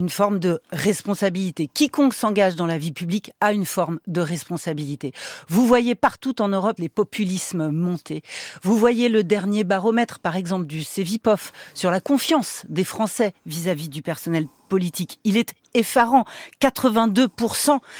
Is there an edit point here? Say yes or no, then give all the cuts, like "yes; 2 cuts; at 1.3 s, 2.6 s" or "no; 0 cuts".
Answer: yes; 1 cut; at 6.8 s